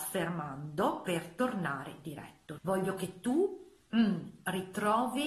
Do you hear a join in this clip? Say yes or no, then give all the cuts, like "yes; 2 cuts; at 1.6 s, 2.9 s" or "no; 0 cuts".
yes; 1 cut; at 2.6 s